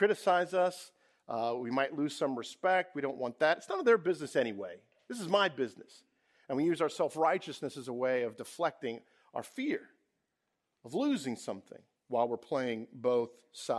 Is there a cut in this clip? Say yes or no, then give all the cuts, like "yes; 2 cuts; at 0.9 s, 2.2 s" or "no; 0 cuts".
no; 0 cuts